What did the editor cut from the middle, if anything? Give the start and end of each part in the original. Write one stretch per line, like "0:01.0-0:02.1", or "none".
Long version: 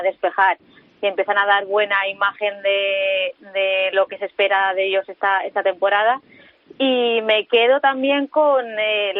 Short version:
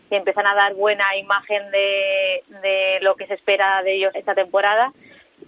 0:05.1-0:05.4